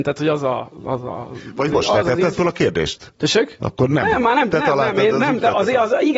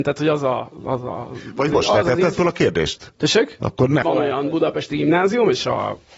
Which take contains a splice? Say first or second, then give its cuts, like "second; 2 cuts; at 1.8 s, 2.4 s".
second; 1 cut; at 4.0 s